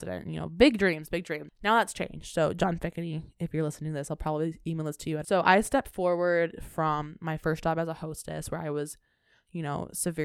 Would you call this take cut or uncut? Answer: cut